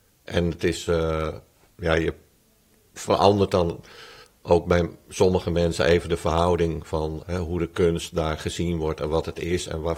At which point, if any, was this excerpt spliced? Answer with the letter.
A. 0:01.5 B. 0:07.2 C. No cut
B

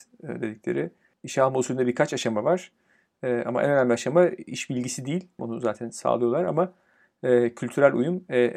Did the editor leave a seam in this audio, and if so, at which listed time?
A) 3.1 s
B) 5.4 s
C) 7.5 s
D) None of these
B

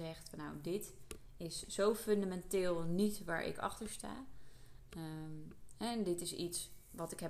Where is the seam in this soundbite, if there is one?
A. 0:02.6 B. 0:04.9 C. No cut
C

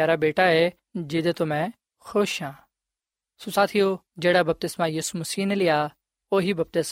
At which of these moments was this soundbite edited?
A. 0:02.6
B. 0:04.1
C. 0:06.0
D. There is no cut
B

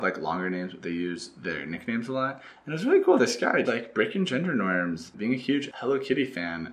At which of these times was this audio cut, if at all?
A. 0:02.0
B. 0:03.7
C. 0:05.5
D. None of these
B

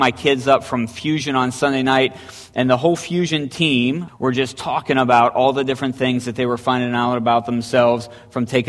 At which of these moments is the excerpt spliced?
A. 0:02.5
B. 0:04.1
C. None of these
B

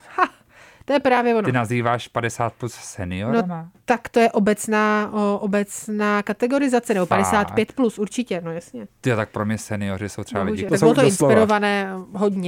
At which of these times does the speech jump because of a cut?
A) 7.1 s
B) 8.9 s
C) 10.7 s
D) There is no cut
C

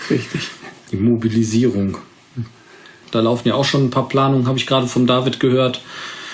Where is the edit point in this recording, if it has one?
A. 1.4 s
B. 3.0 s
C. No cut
B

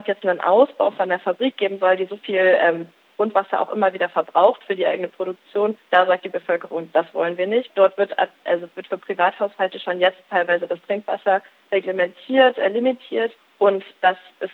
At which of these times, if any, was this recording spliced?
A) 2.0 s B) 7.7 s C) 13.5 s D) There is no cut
B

